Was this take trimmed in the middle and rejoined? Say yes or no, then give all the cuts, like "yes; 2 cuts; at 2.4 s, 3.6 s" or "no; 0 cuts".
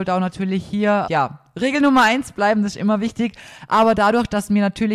yes; 1 cut; at 1.0 s